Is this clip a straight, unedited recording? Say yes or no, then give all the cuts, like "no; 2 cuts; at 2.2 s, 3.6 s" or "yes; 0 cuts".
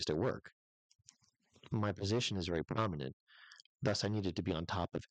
yes; 0 cuts